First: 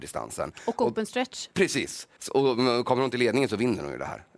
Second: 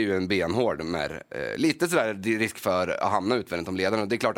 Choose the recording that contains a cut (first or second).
first